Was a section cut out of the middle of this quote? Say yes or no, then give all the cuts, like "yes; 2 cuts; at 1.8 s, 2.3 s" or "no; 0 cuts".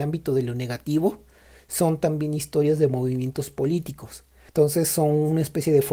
yes; 1 cut; at 4.5 s